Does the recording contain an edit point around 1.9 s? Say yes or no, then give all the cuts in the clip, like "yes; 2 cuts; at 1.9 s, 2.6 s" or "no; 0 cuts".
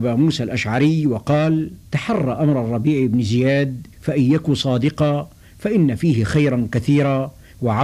yes; 2 cuts; at 1.9 s, 3.9 s